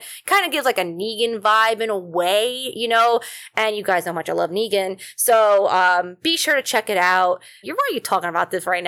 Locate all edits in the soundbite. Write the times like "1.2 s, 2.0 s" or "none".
7.6 s